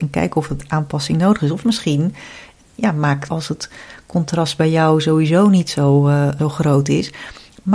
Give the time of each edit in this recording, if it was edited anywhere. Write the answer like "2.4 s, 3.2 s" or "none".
3.3 s